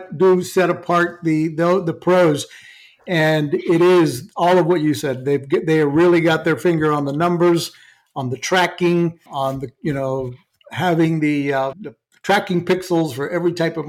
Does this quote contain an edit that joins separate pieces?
yes; 2 cuts; at 9.3 s, 11.7 s

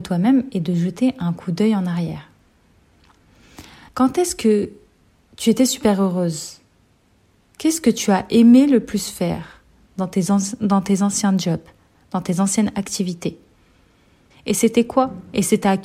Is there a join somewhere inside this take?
yes; 2 cuts; at 3.9 s, 14.3 s

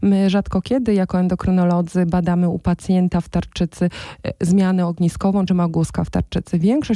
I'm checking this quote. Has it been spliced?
yes; 1 cut; at 5.5 s

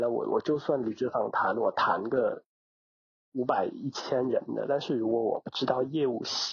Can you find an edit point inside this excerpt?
no; 0 cuts

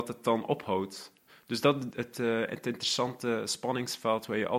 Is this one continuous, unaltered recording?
no; 1 cut; at 1.9 s

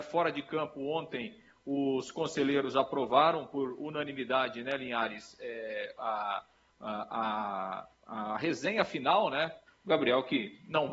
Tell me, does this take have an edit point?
yes; 1 cut; at 9.7 s

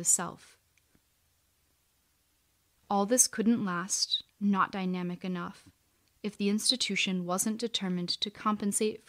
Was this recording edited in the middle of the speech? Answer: yes; 1 cut; at 4.3 s

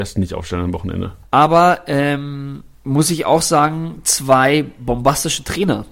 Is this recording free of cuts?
no; 2 cuts; at 1.2 s, 2.7 s

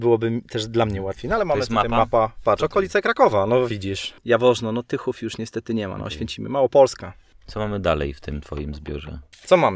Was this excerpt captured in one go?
yes; 0 cuts

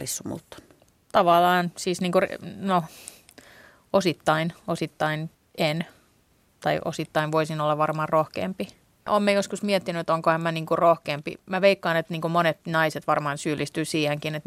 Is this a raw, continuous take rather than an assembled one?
yes; 0 cuts

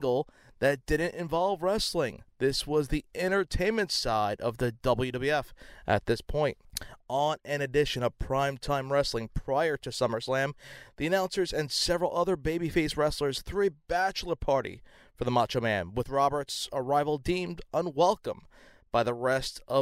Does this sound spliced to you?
yes; 1 cut; at 2.3 s

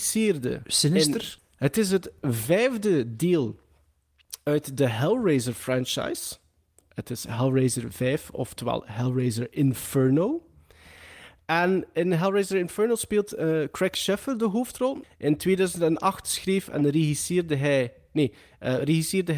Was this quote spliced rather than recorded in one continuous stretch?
yes; 2 cuts; at 1.4 s, 15.0 s

